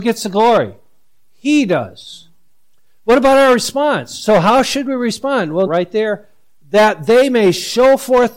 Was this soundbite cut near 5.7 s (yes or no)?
yes